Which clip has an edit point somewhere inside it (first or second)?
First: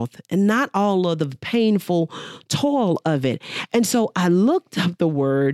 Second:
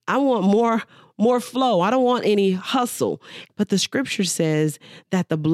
second